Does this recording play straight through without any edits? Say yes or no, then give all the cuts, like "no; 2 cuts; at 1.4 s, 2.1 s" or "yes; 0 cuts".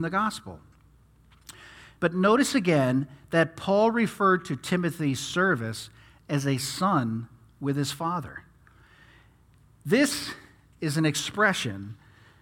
no; 1 cut; at 2.0 s